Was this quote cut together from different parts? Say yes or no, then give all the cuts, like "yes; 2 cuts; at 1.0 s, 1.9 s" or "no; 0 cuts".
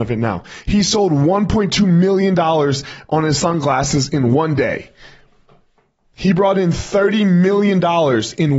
no; 0 cuts